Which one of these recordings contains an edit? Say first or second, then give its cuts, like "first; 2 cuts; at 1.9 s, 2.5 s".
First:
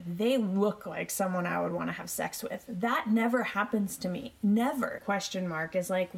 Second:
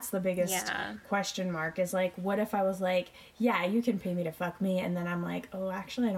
first; 1 cut; at 5.0 s